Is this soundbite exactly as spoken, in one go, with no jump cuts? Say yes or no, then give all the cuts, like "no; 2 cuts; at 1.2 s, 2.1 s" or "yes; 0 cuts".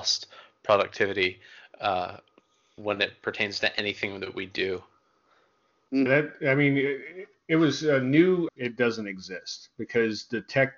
no; 2 cuts; at 6.1 s, 8.5 s